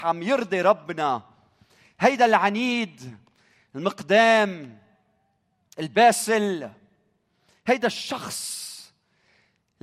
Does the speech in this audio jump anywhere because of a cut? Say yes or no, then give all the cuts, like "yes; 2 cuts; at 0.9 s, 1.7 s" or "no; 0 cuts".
no; 0 cuts